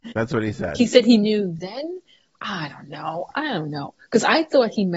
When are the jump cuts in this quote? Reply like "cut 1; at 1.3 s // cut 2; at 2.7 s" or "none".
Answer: none

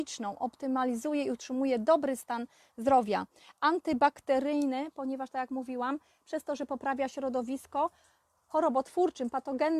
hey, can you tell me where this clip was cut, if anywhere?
none

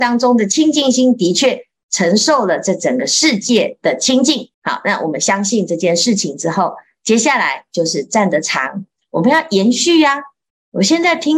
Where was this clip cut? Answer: cut 1; at 4.5 s

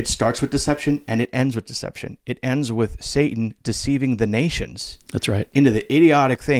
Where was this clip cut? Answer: none

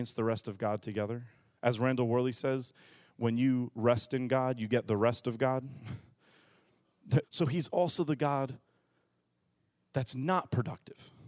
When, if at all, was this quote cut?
cut 1; at 7.2 s

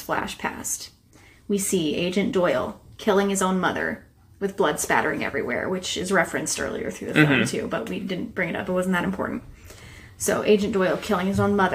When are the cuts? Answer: none

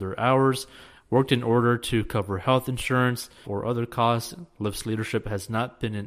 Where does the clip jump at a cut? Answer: cut 1; at 3.4 s

